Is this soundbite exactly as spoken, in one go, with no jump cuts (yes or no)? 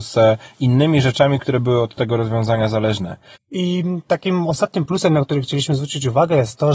no